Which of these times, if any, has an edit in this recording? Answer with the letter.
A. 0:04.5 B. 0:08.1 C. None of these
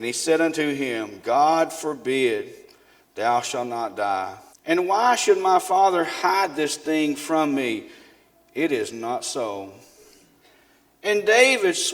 A